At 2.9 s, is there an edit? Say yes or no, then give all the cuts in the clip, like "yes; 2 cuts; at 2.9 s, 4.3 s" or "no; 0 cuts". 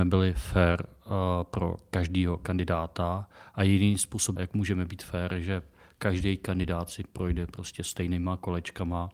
no; 1 cut; at 4.4 s